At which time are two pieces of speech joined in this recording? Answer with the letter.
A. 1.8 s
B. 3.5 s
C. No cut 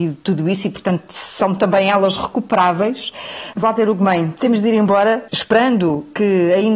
B